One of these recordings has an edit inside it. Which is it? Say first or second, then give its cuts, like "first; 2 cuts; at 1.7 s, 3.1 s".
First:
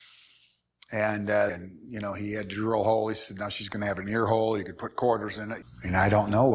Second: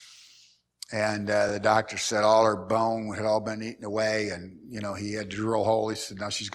first; 2 cuts; at 1.5 s, 5.6 s